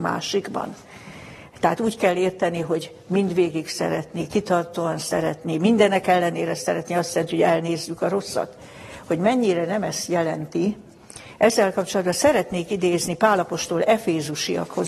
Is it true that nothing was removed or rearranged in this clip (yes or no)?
yes